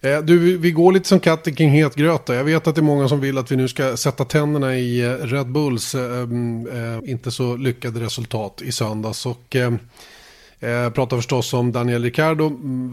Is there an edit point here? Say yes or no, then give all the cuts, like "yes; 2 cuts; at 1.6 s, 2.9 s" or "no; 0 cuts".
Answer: yes; 1 cut; at 7.0 s